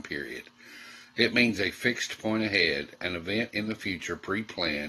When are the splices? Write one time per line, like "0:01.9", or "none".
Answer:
none